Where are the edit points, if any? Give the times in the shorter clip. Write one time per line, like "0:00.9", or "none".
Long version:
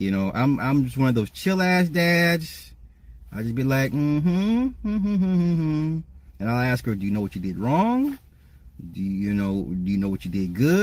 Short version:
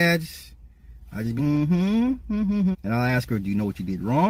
0:01.4
0:02.7

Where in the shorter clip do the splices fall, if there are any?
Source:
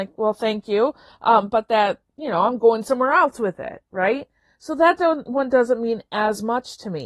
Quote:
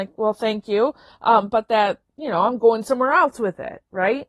none

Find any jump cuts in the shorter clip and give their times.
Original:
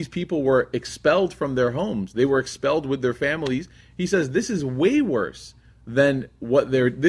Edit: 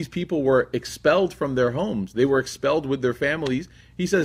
none

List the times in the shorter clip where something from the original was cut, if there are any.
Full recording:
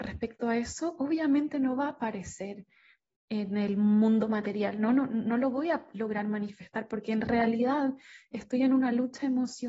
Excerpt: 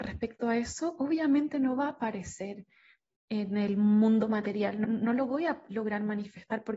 0:04.8

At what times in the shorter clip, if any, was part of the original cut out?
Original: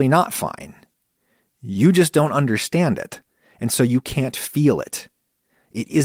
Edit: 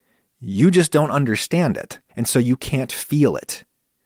0:02.1

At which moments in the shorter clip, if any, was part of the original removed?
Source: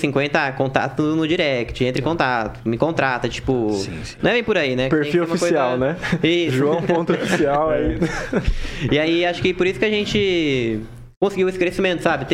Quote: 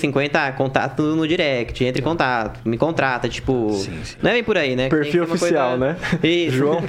none

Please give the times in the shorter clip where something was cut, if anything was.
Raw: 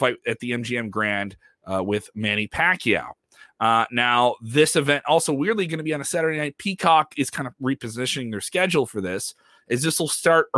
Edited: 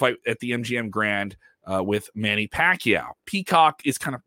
0:03.2

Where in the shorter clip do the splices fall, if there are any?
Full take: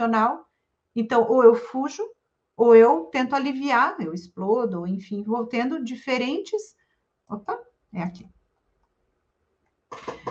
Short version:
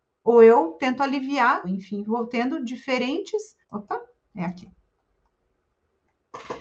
0:01.6
0:03.6

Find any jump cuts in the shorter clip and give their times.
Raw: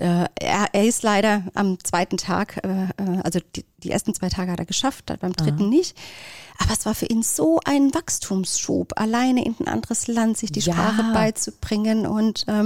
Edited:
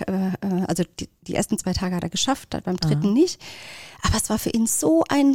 none

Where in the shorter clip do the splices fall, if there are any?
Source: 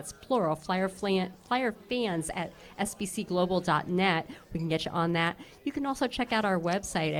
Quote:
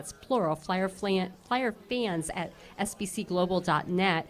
none

